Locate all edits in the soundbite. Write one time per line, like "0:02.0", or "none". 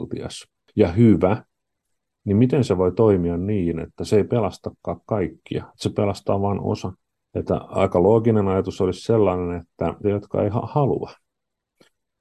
0:07.2
0:10.0